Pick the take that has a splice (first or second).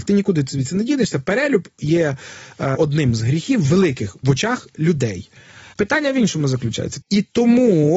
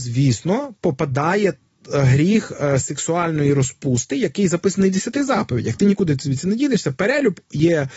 first